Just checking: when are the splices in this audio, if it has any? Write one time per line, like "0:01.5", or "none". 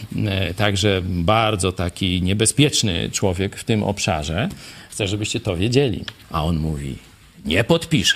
0:04.9
0:06.2